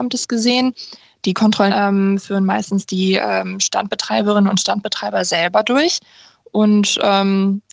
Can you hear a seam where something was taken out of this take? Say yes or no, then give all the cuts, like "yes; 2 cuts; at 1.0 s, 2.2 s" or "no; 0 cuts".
yes; 1 cut; at 1.7 s